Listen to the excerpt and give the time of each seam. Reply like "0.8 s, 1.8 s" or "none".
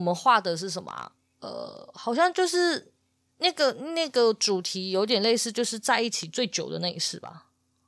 none